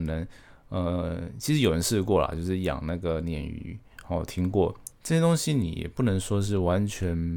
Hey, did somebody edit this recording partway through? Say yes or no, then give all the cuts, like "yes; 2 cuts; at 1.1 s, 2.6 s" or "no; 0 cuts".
yes; 1 cut; at 4.9 s